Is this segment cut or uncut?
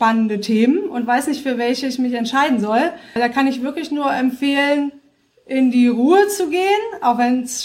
cut